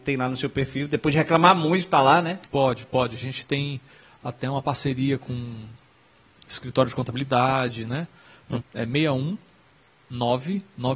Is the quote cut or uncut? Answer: cut